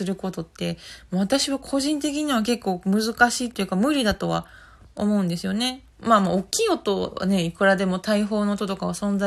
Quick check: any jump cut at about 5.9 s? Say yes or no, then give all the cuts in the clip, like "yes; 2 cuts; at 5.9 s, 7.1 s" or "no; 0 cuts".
yes; 1 cut; at 5.9 s